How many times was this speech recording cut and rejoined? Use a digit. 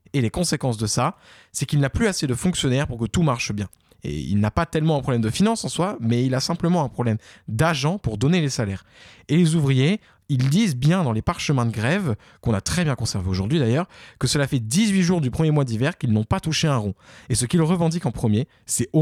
0